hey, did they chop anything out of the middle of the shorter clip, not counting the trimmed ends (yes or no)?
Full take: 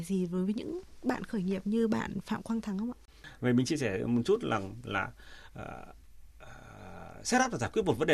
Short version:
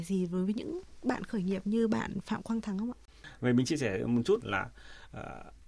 yes